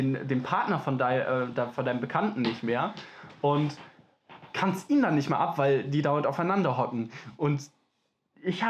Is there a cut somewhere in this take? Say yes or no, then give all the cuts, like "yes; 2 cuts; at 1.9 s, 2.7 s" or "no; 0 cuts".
no; 0 cuts